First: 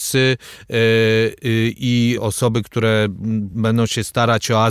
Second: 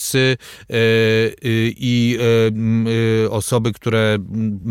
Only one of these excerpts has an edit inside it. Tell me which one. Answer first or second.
first